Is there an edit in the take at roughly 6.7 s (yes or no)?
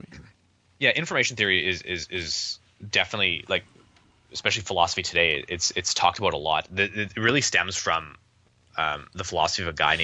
no